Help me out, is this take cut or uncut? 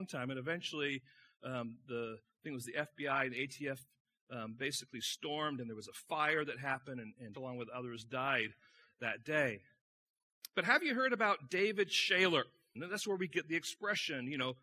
cut